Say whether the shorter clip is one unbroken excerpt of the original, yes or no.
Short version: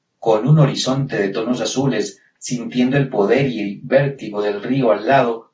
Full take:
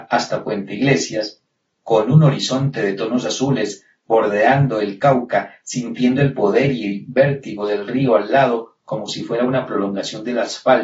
no